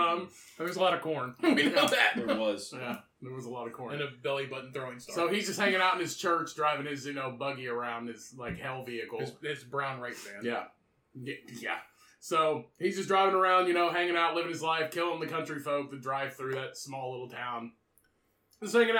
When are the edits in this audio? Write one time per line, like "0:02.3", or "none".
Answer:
none

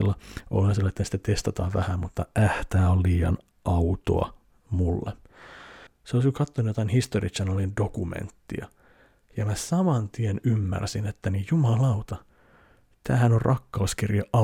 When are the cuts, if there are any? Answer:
0:05.9

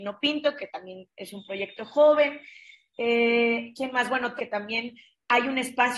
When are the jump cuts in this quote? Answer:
0:04.4

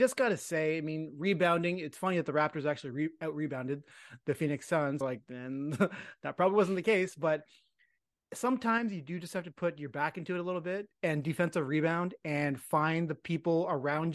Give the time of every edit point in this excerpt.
0:05.0

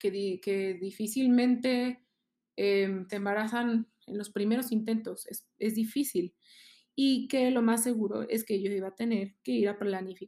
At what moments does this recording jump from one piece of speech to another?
0:03.1

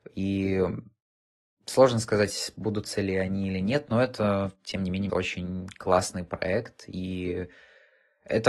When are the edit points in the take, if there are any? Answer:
0:05.1

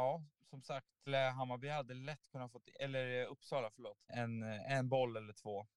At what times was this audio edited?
0:01.1
0:04.1

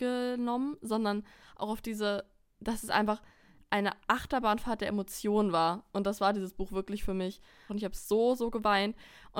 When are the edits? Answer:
0:07.7

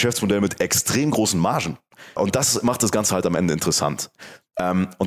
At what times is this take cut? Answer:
0:02.2

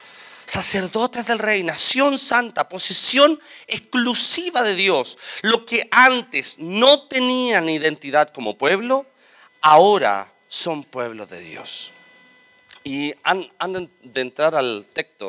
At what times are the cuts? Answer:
none

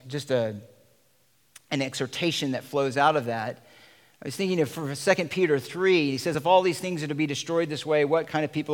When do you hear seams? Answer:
none

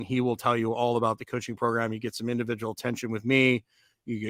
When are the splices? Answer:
none

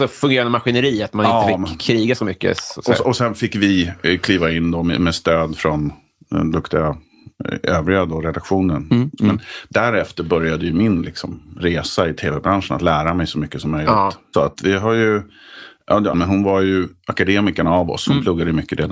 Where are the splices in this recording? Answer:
0:09.2
0:14.3
0:16.1

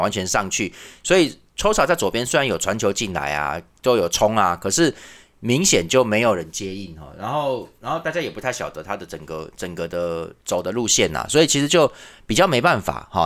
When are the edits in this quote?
none

